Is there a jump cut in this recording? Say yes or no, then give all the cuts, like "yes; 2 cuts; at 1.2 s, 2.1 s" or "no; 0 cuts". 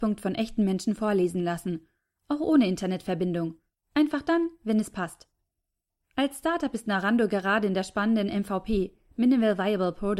no; 0 cuts